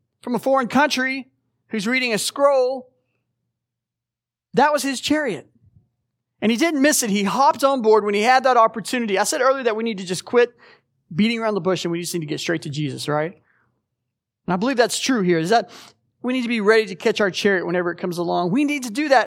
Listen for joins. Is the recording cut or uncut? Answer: uncut